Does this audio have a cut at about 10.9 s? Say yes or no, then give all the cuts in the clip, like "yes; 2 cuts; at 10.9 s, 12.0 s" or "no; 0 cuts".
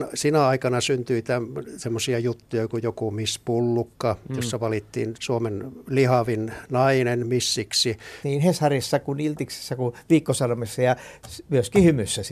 no; 2 cuts; at 5.1 s, 8.2 s